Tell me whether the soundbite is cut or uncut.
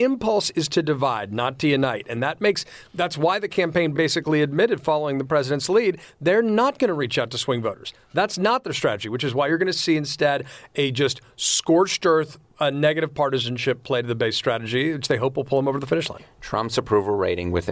uncut